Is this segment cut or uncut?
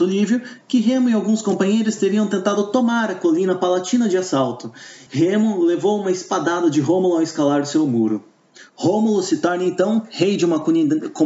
cut